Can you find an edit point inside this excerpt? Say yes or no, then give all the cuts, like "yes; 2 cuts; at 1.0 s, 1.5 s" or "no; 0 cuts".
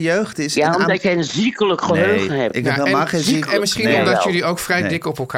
no; 0 cuts